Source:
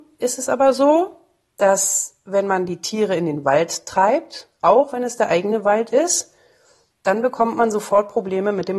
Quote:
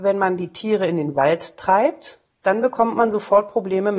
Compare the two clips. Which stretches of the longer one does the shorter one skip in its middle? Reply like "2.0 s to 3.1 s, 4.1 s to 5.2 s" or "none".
4.5 s to 6.8 s